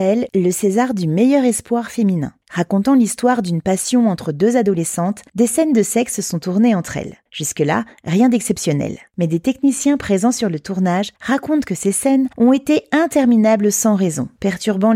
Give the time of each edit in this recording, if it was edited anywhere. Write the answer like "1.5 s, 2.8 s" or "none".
2.4 s